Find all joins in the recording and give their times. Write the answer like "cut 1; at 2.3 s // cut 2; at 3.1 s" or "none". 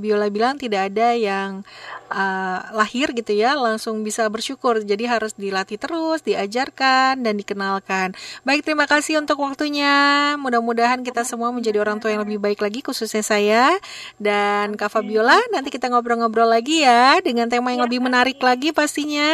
none